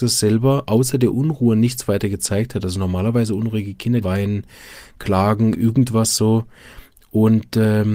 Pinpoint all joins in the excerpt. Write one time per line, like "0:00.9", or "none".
0:04.0